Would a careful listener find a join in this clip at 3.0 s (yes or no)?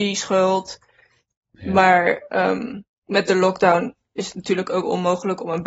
yes